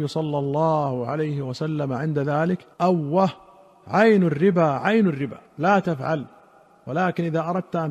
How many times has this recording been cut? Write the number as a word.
two